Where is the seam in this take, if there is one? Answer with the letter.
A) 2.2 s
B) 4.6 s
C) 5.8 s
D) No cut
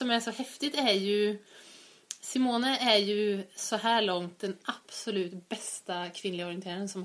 D